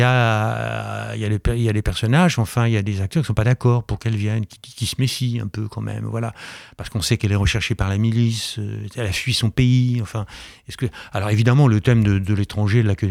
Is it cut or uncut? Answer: uncut